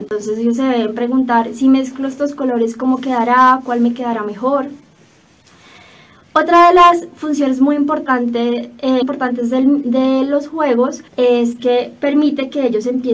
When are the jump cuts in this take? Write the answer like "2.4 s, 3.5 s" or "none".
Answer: 9.0 s, 11.1 s